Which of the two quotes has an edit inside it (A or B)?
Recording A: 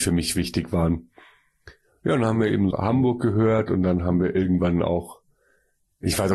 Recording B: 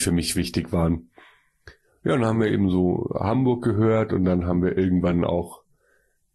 A